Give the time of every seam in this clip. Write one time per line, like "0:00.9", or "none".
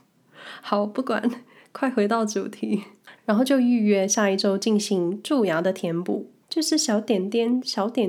0:03.2
0:06.4